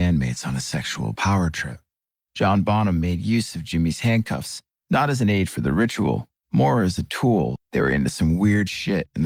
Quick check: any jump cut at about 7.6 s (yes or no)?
yes